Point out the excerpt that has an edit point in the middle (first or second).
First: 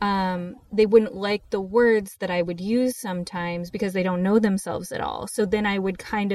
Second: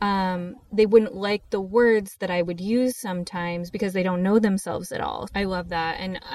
second